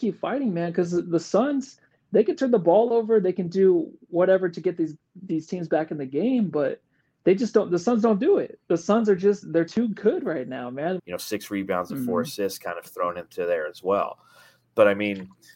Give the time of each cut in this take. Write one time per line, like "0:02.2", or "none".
0:11.0